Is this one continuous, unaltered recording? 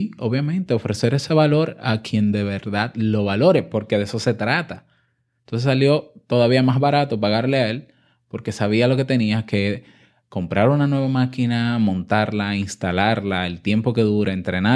no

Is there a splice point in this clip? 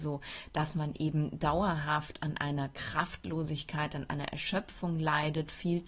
no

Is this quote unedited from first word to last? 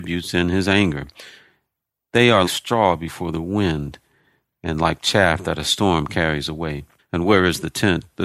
no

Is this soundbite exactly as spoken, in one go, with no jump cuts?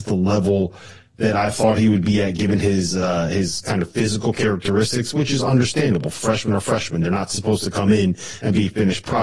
yes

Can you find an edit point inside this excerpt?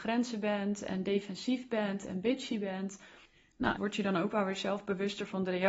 yes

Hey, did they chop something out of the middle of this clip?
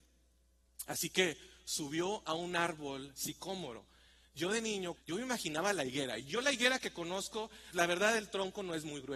yes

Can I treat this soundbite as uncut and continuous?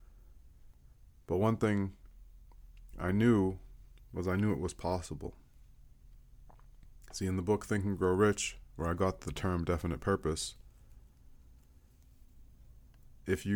yes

